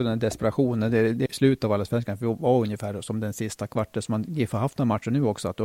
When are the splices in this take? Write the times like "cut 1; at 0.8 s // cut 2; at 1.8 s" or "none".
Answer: cut 1; at 1.3 s

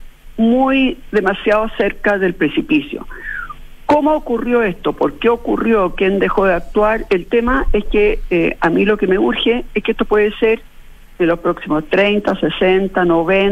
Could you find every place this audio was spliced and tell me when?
cut 1; at 7.1 s

